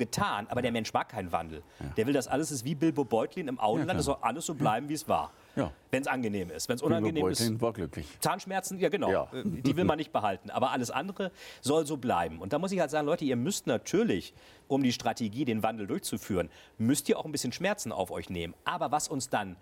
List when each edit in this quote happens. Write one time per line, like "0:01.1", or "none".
none